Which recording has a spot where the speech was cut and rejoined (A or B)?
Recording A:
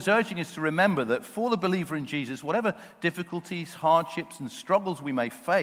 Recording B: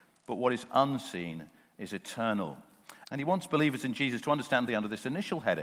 B